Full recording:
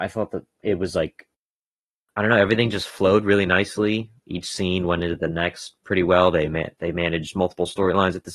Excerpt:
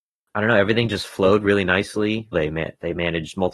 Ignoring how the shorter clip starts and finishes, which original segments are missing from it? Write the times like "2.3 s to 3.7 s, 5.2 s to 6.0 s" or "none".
4.1 s to 6.3 s